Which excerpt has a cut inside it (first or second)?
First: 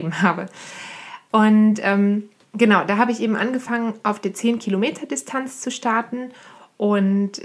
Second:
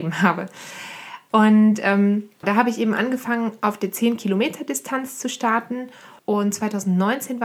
second